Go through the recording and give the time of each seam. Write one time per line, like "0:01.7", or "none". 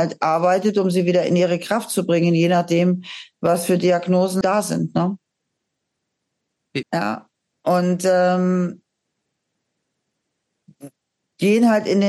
0:04.4
0:06.8